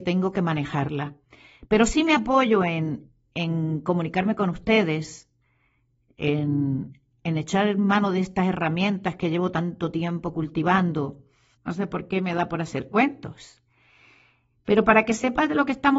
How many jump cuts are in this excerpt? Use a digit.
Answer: 1